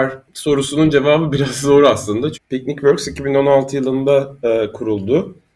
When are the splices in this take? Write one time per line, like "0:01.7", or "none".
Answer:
0:02.3